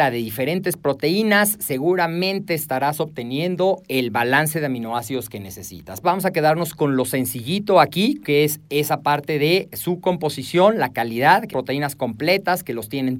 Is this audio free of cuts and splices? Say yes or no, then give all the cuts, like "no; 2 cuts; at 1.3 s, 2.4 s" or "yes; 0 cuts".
no; 2 cuts; at 6.0 s, 11.5 s